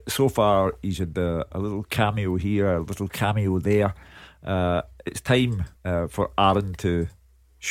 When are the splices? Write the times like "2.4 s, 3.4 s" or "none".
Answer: 5.8 s